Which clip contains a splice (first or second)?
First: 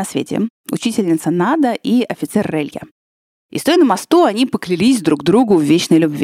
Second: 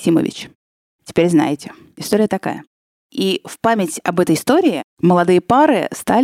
second